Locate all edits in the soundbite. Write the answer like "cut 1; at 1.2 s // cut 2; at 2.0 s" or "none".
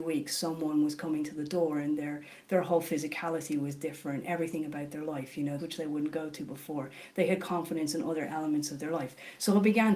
cut 1; at 5.6 s